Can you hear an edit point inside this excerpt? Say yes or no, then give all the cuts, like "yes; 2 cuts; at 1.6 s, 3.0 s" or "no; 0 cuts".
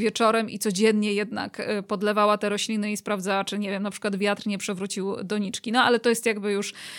no; 0 cuts